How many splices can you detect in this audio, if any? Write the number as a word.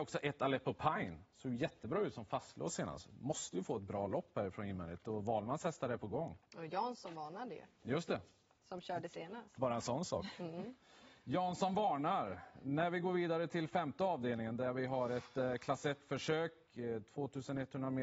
zero